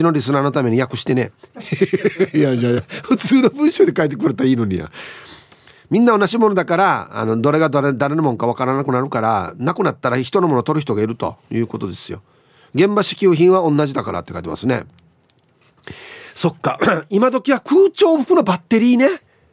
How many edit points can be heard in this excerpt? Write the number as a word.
zero